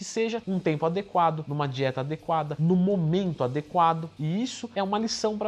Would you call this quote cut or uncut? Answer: cut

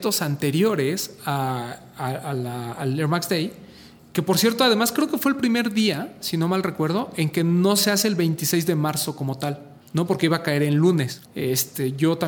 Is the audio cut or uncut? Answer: cut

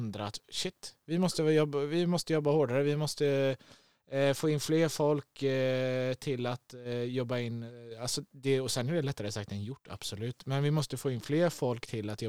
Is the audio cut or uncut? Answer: uncut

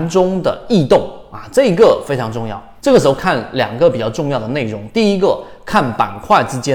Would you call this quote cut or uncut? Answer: cut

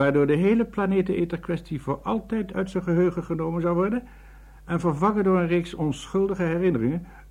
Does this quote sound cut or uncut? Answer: uncut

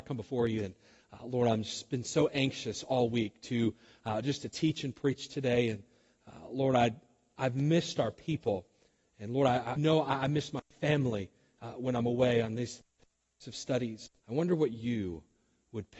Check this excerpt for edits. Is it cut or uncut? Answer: cut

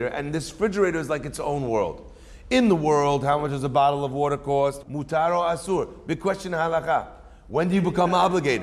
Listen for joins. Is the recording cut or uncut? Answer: cut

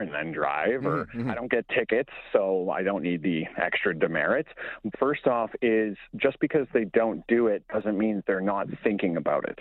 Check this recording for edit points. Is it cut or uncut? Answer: cut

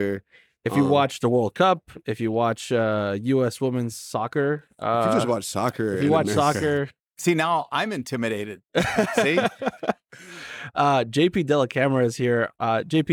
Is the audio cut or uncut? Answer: uncut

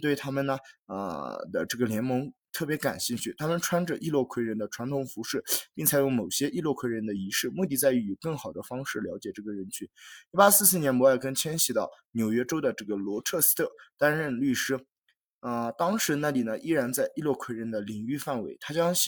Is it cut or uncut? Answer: uncut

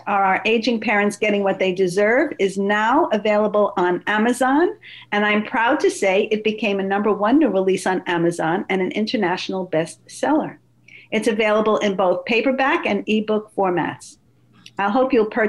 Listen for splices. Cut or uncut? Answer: uncut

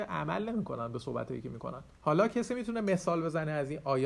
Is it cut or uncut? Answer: cut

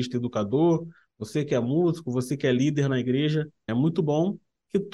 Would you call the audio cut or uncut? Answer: cut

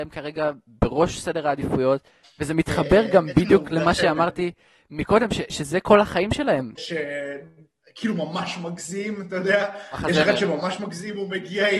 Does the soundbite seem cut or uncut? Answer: cut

